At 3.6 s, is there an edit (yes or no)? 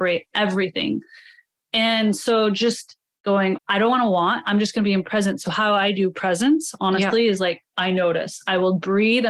yes